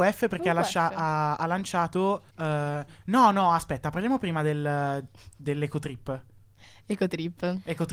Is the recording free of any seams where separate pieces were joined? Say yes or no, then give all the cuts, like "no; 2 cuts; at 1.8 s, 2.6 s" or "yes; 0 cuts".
no; 1 cut; at 2.3 s